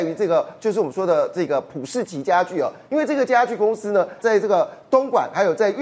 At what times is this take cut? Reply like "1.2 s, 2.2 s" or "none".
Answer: 4.2 s